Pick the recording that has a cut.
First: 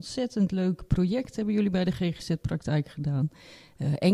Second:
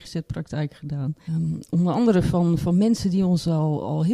second; 1 cut; at 1.3 s

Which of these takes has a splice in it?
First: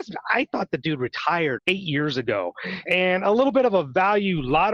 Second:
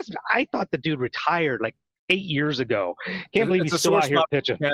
first; 2 cuts; at 1.6 s, 2.9 s

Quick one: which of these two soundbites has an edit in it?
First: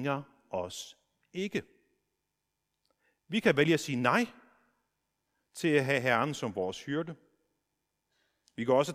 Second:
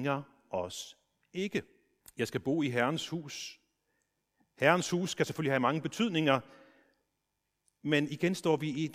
second; 1 cut; at 2.0 s

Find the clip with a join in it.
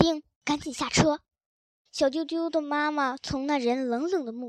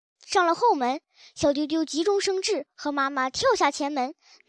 first; 1 cut; at 1.9 s

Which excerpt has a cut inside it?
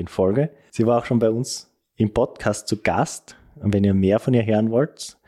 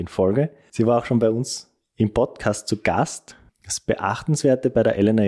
second; 1 cut; at 3.5 s

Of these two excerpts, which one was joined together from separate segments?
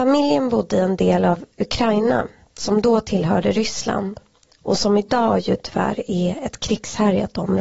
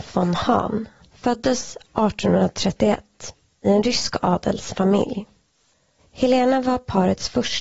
second; 2 cuts; at 1.0 s, 6.0 s

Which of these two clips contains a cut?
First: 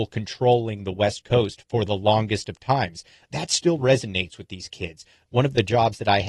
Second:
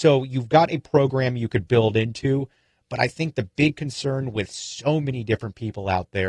first; 1 cut; at 5.3 s

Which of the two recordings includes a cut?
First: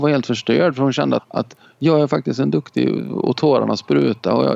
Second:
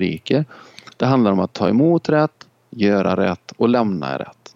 first; 1 cut; at 1.2 s

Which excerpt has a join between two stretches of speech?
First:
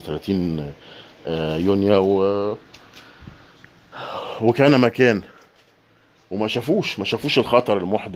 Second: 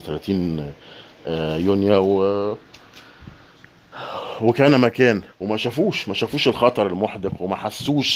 second; 1 cut; at 5.3 s

